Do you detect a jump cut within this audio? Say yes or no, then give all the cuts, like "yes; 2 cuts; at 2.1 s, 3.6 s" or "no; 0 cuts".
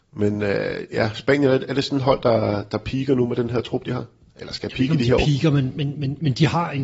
no; 0 cuts